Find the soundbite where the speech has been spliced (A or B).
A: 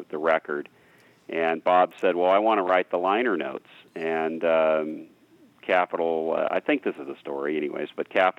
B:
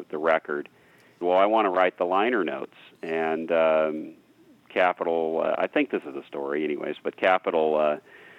B